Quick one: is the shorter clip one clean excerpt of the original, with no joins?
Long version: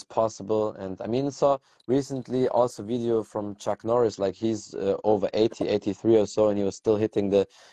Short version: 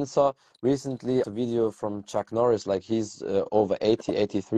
no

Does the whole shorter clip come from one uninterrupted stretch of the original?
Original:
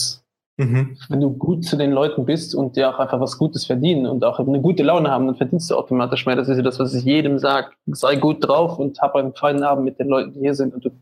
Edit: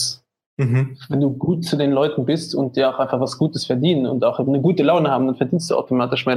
yes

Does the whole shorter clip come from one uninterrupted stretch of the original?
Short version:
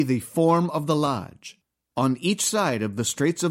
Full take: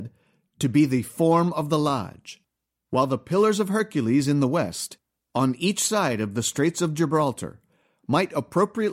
no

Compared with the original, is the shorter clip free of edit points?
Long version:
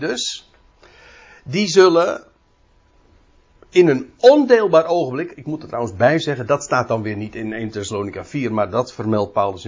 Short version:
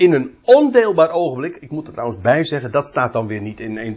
yes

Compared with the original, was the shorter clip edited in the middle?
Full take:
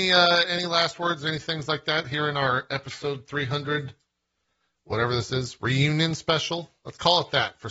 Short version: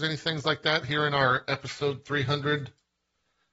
no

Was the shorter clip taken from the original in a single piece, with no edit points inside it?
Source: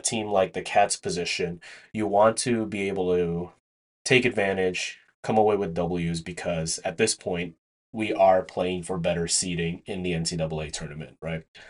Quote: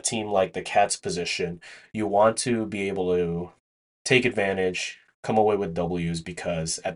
yes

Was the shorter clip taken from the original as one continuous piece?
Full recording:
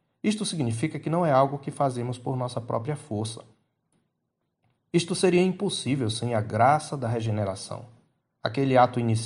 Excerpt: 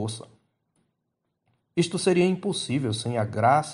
yes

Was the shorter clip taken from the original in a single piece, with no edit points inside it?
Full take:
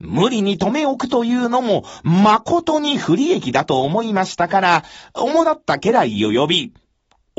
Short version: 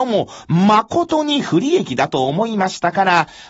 yes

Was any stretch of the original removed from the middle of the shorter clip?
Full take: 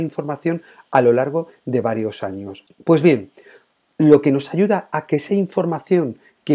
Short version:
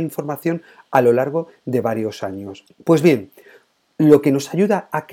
no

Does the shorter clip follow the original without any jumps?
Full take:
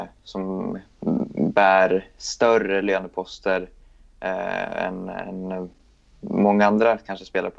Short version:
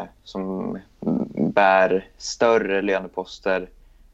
yes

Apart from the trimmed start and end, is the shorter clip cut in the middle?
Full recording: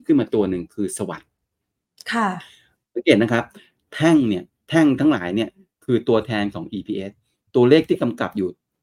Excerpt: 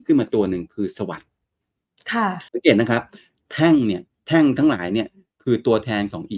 yes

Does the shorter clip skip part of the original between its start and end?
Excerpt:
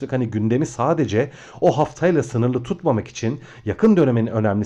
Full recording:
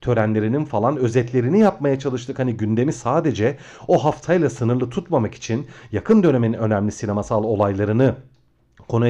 no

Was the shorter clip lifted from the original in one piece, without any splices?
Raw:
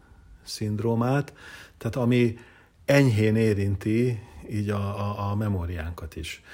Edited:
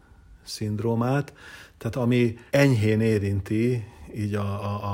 no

